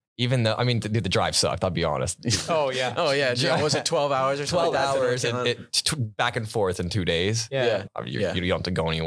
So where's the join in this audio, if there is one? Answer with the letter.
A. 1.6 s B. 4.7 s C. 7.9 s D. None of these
C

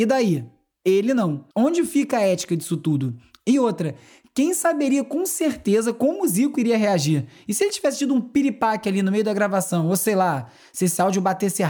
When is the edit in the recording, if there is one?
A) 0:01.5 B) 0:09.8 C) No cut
A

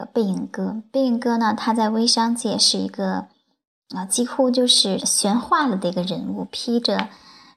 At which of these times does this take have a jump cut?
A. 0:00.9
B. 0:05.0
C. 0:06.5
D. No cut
B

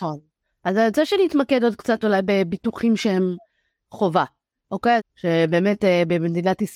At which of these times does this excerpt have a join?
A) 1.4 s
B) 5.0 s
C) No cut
B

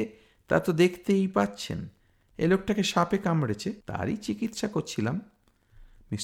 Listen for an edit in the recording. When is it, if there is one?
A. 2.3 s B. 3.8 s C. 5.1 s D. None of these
B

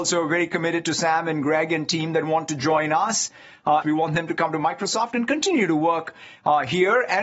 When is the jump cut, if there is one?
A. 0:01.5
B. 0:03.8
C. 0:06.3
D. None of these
B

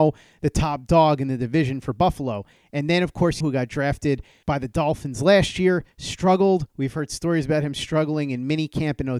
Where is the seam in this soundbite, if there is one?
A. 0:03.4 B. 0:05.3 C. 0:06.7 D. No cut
A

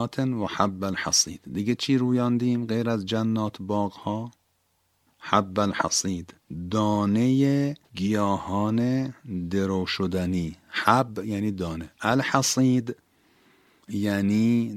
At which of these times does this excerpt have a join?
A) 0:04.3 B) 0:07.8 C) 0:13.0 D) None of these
B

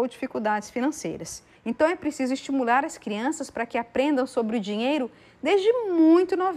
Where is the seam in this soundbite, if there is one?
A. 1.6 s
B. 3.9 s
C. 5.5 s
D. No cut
A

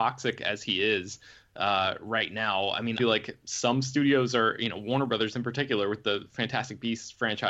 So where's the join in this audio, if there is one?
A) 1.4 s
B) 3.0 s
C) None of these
B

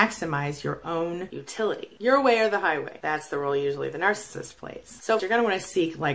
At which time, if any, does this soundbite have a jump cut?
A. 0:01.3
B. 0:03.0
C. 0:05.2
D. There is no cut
C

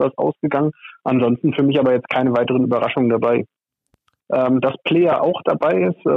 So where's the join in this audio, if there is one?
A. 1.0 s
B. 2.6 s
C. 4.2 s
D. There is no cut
C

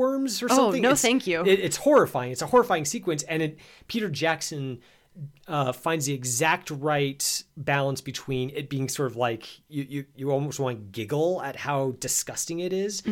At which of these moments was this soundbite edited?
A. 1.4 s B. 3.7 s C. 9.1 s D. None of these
D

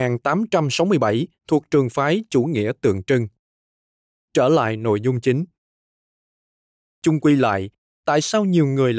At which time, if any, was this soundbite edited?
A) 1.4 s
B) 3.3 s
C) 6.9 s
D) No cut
A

